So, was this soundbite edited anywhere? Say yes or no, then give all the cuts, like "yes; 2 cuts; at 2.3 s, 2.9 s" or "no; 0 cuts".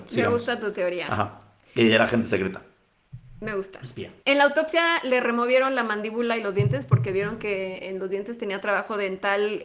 yes; 1 cut; at 4.2 s